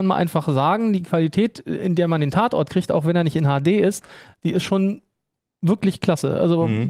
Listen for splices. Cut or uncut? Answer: uncut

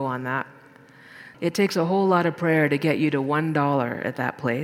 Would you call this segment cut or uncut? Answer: cut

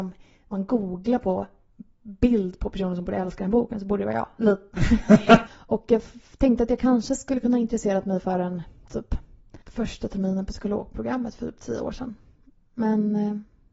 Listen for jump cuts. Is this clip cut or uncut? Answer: cut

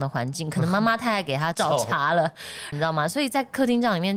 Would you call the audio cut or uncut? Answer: cut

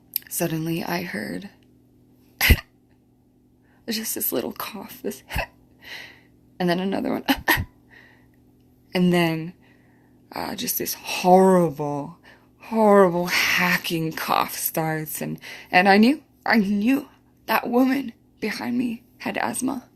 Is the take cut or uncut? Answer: uncut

